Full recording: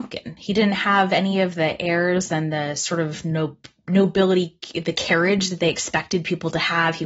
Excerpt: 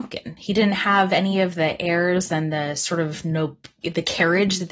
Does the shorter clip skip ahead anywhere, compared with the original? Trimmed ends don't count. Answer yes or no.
yes